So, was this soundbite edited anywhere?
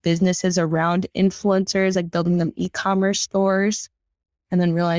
no; 0 cuts

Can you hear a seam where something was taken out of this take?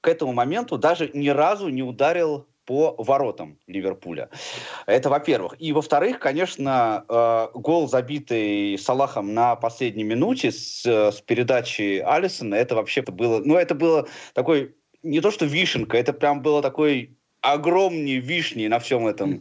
yes; 1 cut; at 13.0 s

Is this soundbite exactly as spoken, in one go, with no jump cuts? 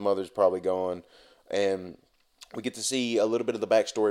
yes; 0 cuts

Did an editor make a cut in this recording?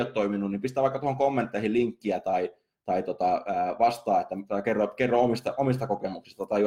no; 0 cuts

